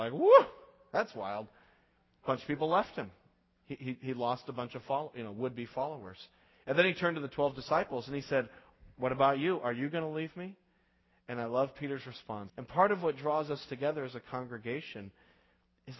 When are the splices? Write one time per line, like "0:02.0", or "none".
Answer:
0:12.5

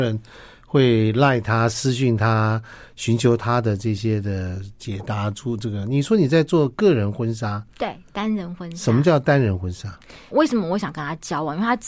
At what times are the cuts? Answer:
0:10.3

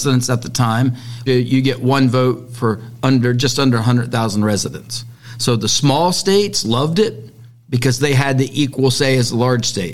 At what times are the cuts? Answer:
0:01.3

